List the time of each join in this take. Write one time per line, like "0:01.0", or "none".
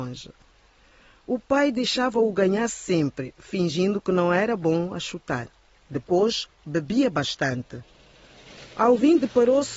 0:05.8